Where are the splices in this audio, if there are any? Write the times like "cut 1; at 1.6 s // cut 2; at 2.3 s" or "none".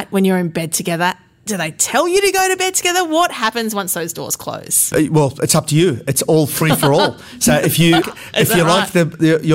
cut 1; at 8.0 s